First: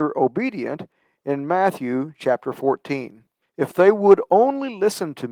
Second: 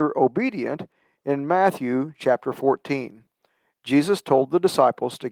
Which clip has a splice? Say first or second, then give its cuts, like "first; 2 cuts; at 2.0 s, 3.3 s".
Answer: first; 1 cut; at 3.4 s